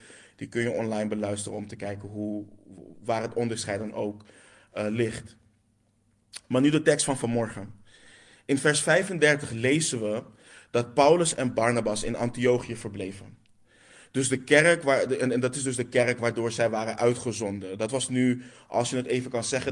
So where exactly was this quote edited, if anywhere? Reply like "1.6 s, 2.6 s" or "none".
none